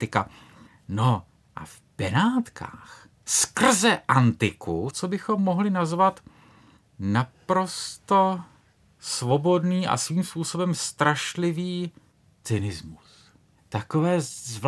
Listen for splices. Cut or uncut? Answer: cut